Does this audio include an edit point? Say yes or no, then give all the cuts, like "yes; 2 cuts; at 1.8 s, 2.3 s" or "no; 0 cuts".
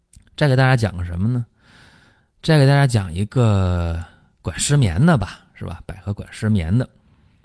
no; 0 cuts